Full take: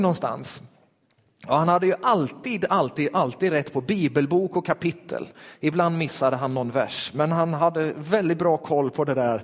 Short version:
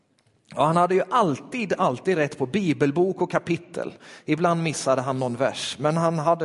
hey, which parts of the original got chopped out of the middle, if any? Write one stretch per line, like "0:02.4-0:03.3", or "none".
0:02.7-0:03.1